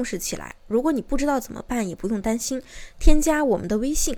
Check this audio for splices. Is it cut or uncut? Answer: uncut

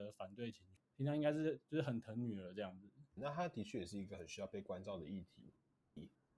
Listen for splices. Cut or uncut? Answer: cut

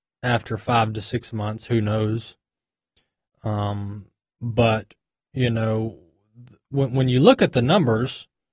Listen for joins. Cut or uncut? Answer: uncut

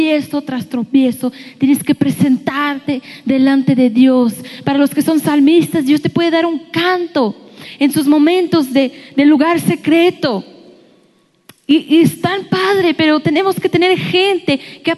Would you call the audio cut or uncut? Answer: uncut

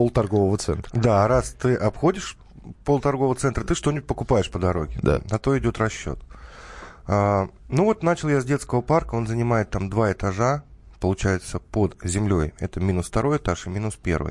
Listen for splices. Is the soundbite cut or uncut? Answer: uncut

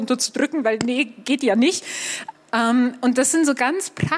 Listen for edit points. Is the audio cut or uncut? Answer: cut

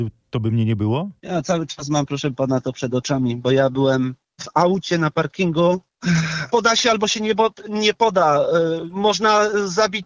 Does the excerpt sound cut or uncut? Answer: cut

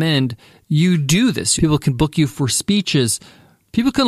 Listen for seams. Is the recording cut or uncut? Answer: cut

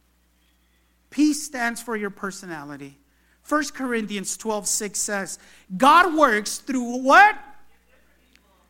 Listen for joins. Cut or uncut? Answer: uncut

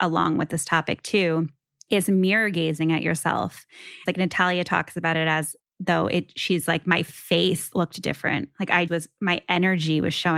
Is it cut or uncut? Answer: cut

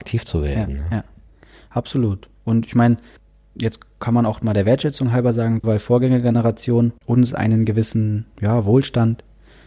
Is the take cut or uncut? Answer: cut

